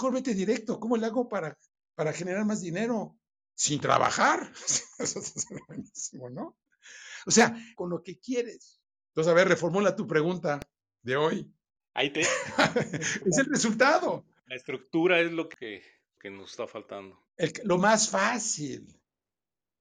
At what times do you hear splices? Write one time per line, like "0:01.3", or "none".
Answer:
0:07.7
0:11.8
0:17.3